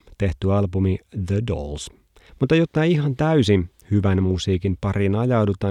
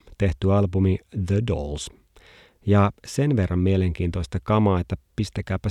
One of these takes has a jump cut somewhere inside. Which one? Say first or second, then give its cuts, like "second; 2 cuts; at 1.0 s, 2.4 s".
first; 1 cut; at 2.3 s